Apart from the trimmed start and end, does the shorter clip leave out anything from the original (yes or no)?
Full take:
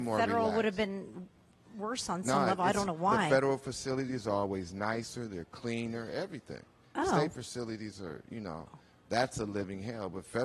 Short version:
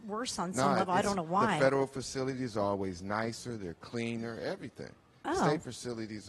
no